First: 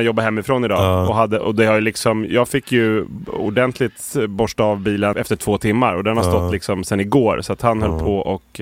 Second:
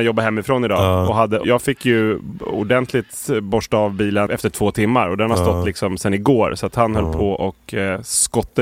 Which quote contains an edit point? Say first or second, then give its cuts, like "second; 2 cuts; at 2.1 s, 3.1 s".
second; 1 cut; at 1.4 s